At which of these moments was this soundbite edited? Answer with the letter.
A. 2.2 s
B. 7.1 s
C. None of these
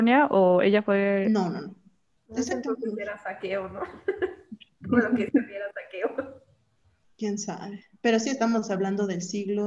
A